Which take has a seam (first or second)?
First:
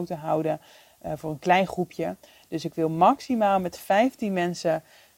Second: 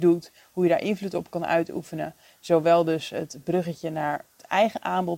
second